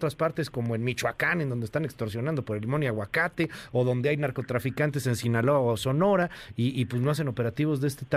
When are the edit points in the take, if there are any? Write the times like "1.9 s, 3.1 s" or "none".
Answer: none